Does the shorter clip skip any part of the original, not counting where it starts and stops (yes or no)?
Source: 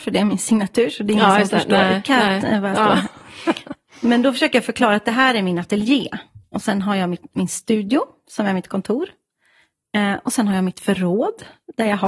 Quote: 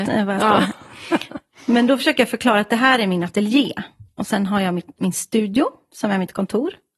no